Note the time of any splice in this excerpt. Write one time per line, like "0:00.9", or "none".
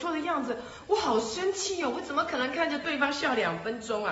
none